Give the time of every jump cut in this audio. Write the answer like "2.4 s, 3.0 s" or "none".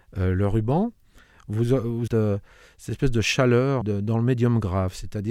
2.1 s, 3.8 s